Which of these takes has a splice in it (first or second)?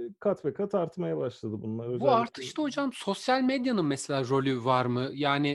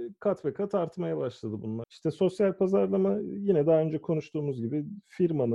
second